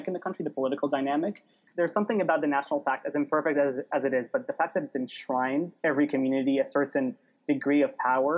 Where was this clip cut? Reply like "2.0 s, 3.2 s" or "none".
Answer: 1.7 s